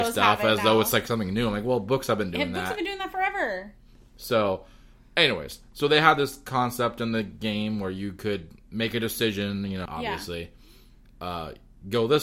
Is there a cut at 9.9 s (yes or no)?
yes